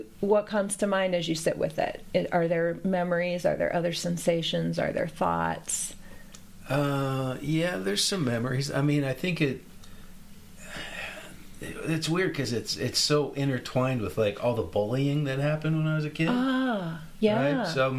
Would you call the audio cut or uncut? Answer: uncut